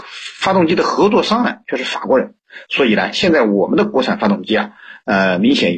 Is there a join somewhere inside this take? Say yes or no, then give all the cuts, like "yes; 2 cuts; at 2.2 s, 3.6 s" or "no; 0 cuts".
yes; 1 cut; at 2.7 s